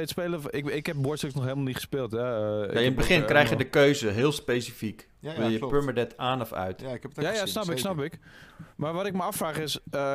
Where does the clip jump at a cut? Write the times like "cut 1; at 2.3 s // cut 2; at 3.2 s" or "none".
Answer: none